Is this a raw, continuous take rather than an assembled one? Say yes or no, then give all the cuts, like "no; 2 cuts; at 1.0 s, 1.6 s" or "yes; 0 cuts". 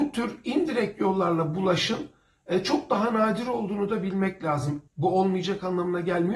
no; 1 cut; at 4.9 s